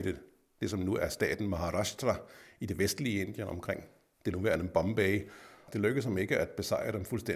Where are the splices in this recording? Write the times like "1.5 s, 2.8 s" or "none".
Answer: 5.7 s